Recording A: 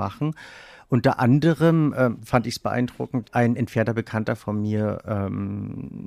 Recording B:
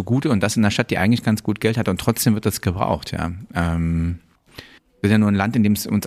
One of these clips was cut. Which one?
A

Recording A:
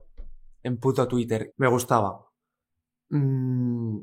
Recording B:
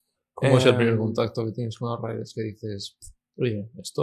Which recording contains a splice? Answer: A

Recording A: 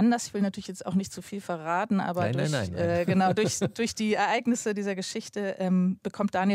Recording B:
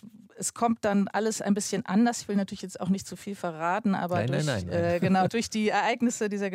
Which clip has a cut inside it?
B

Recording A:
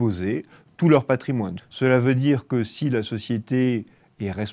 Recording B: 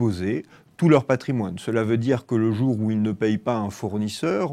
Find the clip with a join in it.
A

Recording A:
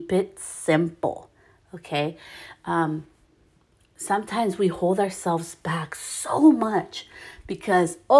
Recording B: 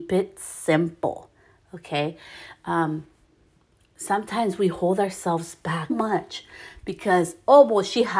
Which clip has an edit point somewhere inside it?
B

